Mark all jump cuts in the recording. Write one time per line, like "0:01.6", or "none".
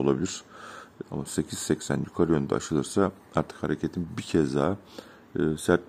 0:01.0